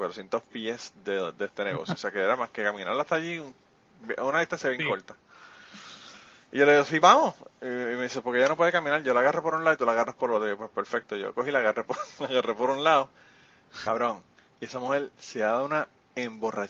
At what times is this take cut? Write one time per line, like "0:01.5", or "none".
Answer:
0:07.0
0:13.9

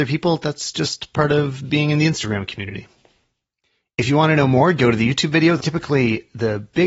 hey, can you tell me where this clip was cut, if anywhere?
0:05.6

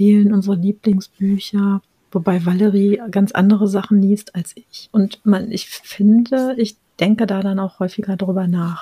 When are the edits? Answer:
0:04.9

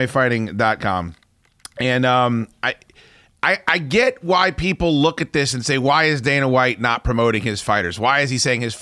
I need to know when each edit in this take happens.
none

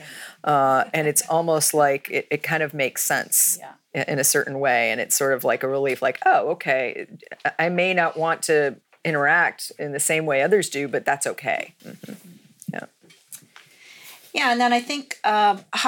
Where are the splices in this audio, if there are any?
0:11.8

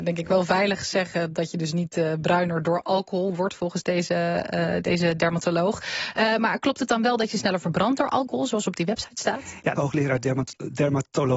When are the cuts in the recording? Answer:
0:09.8

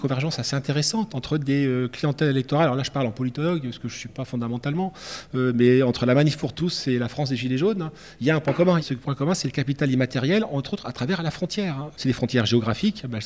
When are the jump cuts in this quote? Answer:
0:08.8
0:11.9

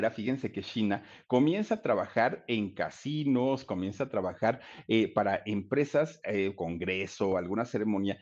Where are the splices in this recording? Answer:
0:06.6

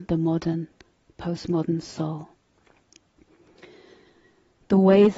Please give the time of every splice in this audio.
none

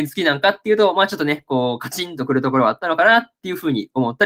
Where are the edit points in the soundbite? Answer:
none

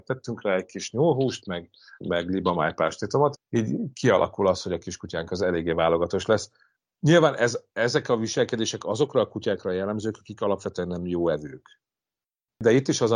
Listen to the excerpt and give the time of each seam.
0:02.0
0:03.3

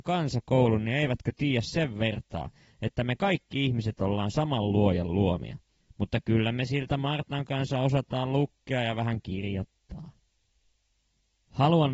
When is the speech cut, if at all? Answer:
0:05.8

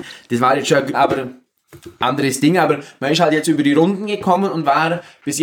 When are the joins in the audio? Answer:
0:00.9

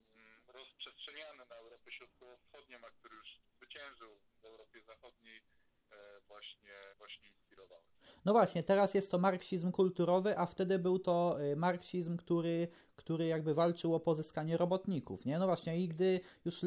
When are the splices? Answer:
0:06.9

